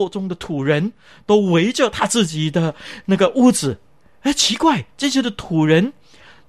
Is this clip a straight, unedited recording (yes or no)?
yes